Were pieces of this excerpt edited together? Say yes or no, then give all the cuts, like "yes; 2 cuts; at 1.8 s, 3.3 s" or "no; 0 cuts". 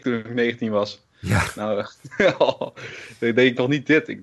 no; 0 cuts